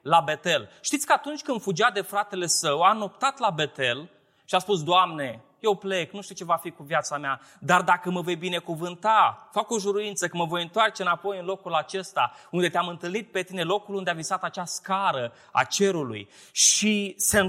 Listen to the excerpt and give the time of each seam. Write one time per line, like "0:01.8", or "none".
none